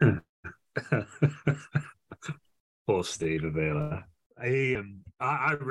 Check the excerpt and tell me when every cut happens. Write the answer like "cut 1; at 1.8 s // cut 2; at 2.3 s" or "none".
cut 1; at 4.8 s